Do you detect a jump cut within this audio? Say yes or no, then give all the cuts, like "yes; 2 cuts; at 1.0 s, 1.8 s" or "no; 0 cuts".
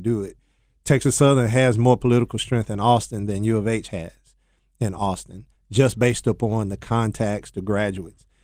no; 0 cuts